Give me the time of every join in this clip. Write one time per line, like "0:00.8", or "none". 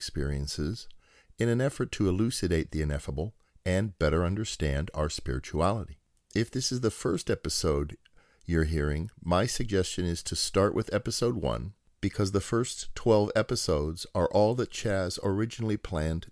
none